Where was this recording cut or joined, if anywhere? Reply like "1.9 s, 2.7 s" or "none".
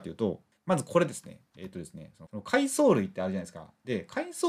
none